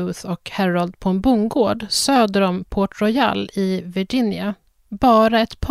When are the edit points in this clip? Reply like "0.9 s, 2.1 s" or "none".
none